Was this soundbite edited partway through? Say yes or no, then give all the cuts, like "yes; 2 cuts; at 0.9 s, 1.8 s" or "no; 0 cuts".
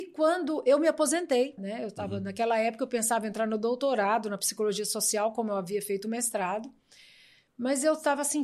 yes; 1 cut; at 1.6 s